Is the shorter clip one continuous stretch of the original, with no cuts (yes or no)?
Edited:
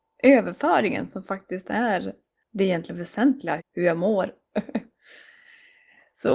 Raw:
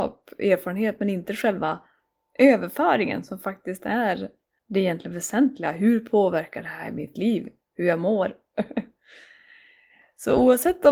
no